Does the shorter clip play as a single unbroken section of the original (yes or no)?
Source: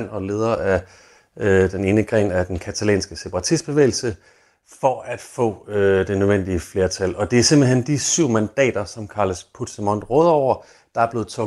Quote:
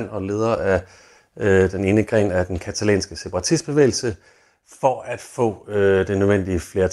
yes